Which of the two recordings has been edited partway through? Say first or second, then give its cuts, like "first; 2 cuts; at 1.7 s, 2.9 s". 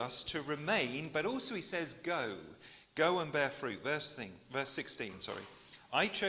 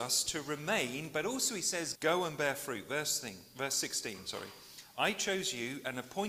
second; 1 cut; at 1.9 s